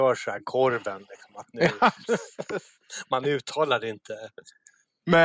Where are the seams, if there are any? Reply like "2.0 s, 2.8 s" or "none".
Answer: none